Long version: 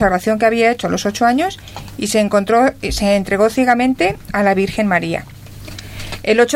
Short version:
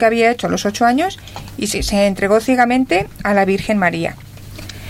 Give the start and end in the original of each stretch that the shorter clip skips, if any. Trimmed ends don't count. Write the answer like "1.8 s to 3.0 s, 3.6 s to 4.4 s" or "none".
2.1 s to 2.8 s